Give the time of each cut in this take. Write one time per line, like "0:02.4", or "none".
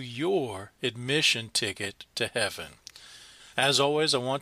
0:03.5